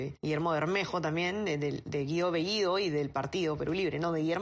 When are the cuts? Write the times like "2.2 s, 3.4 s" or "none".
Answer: none